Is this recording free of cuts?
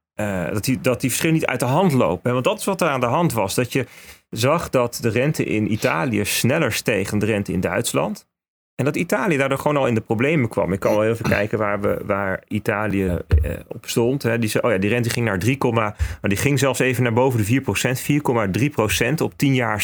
no; 1 cut; at 13.1 s

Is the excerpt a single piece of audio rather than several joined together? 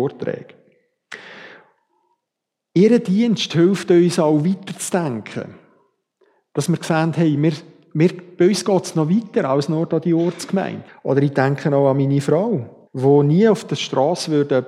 no; 2 cuts; at 10.9 s, 12.9 s

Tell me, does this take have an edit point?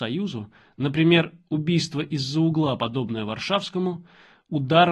no; 0 cuts

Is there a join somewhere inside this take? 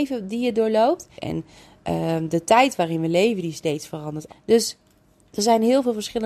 yes; 2 cuts; at 1.2 s, 4.3 s

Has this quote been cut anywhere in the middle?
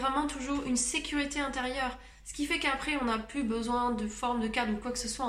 no; 0 cuts

